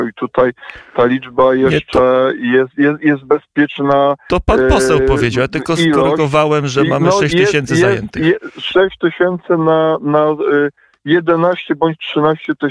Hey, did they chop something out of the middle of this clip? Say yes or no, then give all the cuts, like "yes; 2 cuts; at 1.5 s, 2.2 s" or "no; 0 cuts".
no; 0 cuts